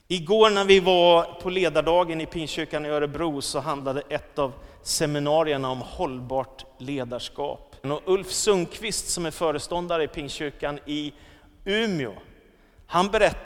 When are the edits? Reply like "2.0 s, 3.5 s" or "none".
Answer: 7.8 s